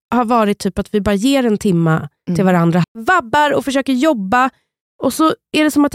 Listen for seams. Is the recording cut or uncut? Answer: cut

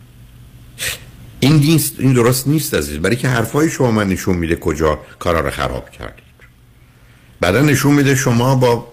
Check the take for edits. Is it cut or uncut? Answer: uncut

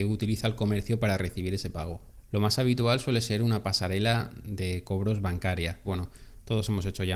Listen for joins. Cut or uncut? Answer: cut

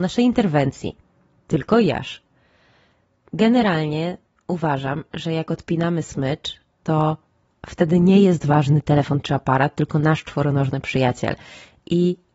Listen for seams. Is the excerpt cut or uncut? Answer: uncut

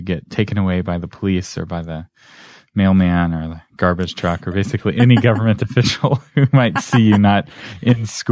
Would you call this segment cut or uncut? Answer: uncut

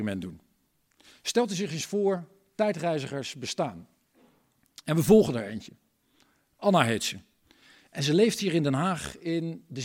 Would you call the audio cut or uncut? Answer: uncut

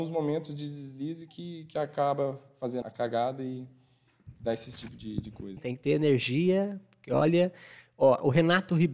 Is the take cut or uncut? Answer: cut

